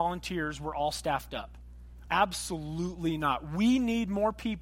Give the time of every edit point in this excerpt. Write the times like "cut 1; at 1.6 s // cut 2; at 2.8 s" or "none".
cut 1; at 2.1 s